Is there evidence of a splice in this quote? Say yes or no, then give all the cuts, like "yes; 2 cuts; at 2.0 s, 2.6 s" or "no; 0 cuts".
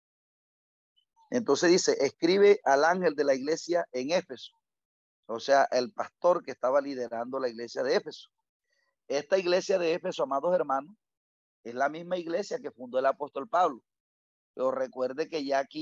no; 0 cuts